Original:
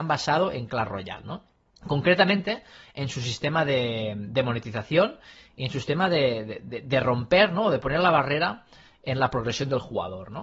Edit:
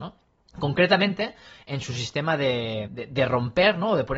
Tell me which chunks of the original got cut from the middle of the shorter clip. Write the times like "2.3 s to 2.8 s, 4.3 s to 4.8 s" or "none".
4.1 s to 6.6 s